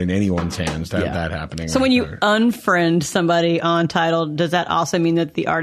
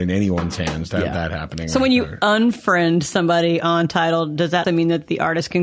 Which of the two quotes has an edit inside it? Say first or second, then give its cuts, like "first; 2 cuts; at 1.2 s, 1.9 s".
second; 1 cut; at 4.6 s